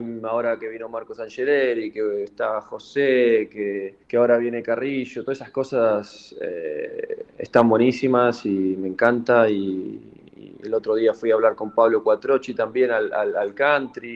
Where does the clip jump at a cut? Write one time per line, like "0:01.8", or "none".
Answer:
0:04.0